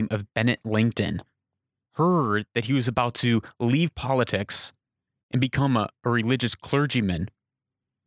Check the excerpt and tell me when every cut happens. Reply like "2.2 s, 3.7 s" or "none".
none